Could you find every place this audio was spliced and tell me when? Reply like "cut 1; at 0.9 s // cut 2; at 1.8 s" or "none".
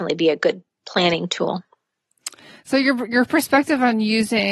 none